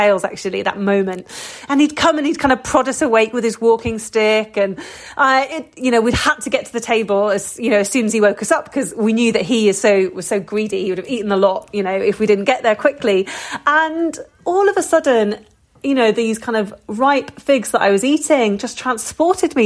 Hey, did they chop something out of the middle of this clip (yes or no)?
no